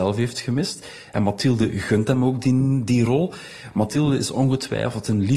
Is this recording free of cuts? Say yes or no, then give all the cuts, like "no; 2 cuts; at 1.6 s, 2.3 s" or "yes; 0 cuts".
yes; 0 cuts